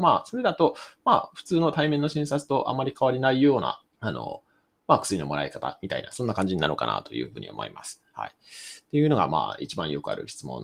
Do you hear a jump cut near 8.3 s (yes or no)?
no